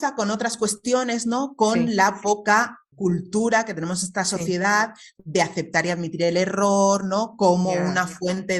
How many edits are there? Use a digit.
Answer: 1